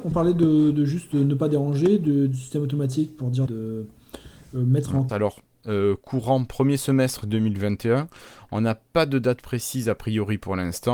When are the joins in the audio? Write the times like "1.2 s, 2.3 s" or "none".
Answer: 3.5 s, 5.1 s